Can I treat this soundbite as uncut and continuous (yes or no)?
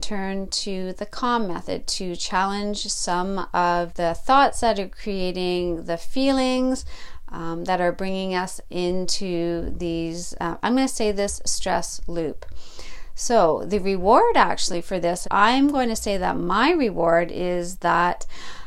no